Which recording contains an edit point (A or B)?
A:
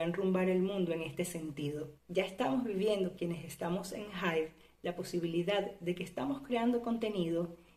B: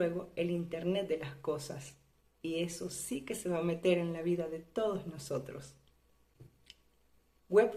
A